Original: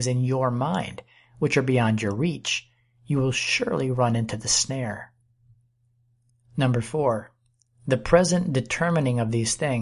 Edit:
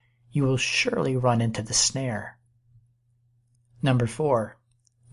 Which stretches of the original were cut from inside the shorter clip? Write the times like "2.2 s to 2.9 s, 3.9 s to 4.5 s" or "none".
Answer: none